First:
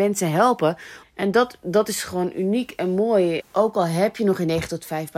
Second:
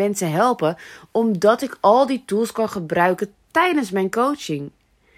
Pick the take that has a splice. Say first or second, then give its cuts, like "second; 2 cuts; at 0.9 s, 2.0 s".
first; 2 cuts; at 1.0 s, 3.4 s